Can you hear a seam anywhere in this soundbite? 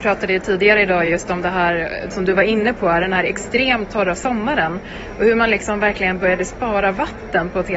no; 0 cuts

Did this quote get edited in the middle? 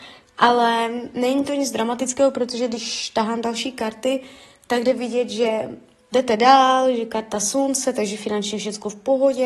yes; 1 cut; at 6.1 s

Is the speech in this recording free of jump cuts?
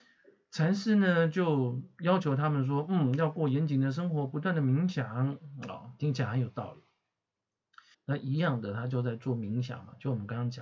no; 1 cut; at 7.9 s

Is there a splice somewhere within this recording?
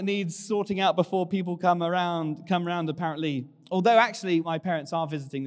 yes; 1 cut; at 4.4 s

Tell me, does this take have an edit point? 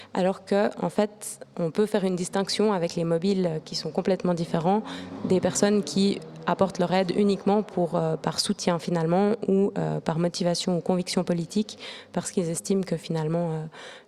no; 0 cuts

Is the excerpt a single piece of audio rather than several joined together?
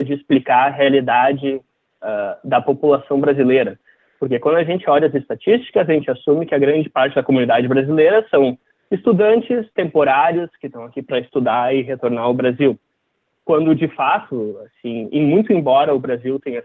yes; 0 cuts

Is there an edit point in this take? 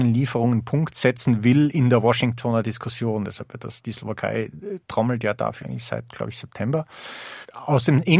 yes; 1 cut; at 5.6 s

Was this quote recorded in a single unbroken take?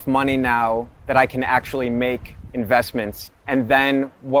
yes; 0 cuts

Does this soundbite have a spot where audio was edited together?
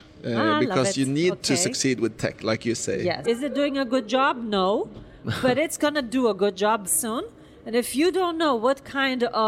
yes; 2 cuts; at 3.2 s, 6.9 s

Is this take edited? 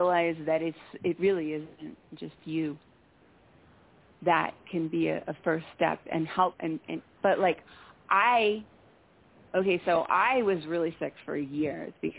yes; 1 cut; at 7.2 s

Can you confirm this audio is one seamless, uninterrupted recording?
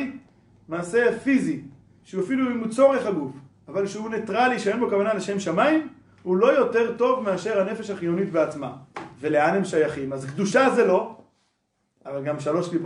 yes; 0 cuts

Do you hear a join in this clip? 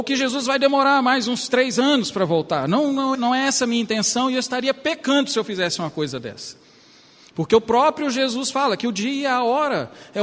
yes; 1 cut; at 3.1 s

